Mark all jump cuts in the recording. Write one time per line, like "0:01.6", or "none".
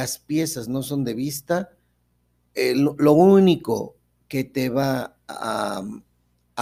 none